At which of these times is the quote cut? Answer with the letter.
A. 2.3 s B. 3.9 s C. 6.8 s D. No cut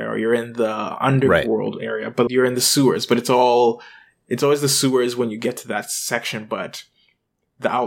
A